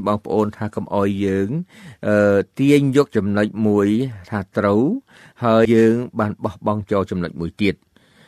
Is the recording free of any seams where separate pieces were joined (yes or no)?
no